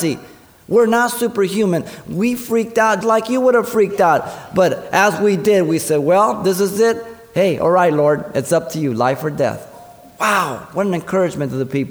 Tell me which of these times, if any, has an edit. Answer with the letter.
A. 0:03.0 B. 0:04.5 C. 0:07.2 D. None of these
A